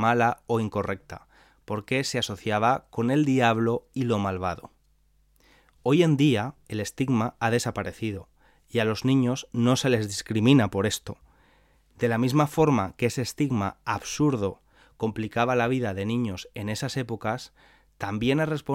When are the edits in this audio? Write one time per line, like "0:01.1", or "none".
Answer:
none